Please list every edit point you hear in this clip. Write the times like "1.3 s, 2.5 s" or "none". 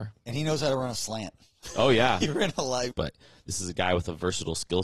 2.9 s